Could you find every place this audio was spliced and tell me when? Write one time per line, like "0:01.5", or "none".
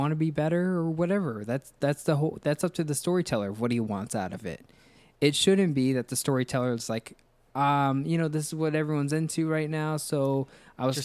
none